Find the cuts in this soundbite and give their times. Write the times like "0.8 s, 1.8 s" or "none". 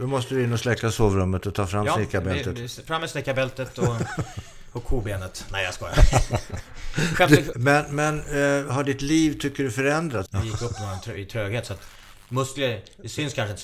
7.5 s, 10.3 s